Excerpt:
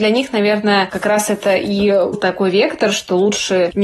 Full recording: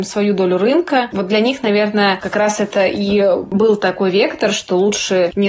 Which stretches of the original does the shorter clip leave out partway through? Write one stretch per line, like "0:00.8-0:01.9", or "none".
0:03.4-0:03.7